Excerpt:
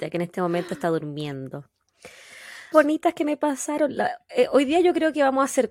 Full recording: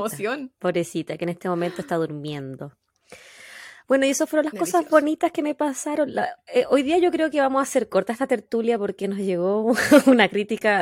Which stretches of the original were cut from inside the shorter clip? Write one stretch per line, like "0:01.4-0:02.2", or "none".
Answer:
0:03.8-0:04.9